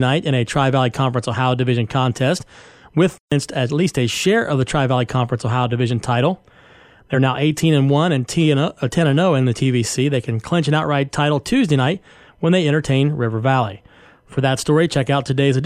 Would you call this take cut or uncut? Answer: uncut